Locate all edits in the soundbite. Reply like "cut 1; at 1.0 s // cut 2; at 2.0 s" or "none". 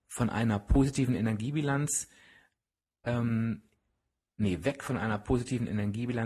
none